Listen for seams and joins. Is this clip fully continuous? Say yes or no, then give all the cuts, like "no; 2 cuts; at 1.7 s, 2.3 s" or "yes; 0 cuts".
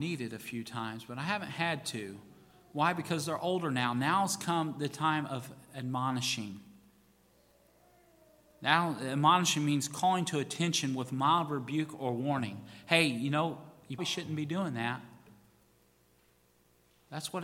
no; 1 cut; at 14.0 s